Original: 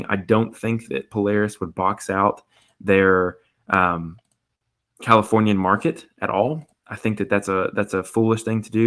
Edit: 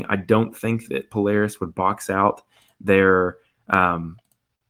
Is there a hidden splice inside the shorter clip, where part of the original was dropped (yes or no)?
no